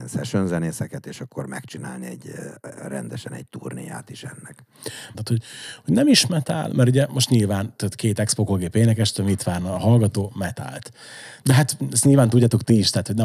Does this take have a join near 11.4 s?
yes; 2 cuts; at 5.1 s, 11.4 s

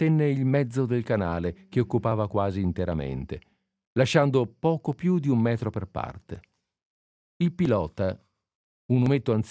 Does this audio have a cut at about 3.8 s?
no; 1 cut; at 7.2 s

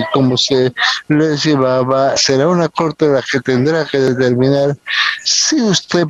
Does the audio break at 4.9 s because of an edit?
no; 1 cut; at 2.2 s

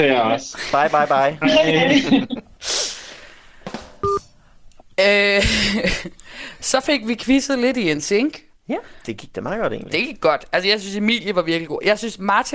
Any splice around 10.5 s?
no; 1 cut; at 1.4 s

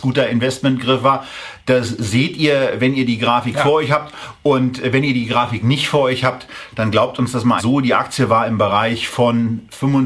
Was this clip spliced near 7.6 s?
yes; 1 cut; at 7.6 s

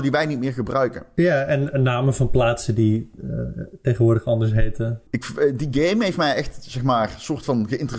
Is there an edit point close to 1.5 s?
no; 1 cut; at 5.1 s

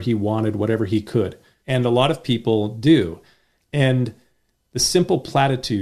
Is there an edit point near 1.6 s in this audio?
yes; 2 cuts; at 1.6 s, 3.6 s

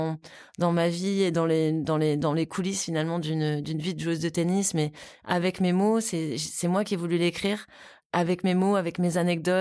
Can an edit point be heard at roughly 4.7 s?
no; 0 cuts

